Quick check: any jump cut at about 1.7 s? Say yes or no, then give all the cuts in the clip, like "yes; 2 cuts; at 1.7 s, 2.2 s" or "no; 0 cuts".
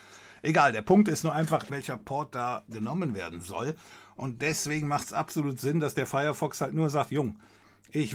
yes; 1 cut; at 1.7 s